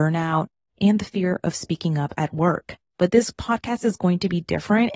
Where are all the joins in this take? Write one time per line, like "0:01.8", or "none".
0:02.8